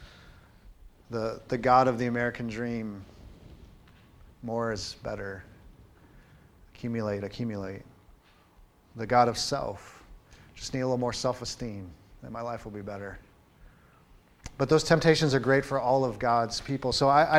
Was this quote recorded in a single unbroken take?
yes; 0 cuts

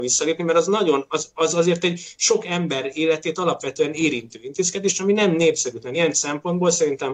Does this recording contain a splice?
no; 0 cuts

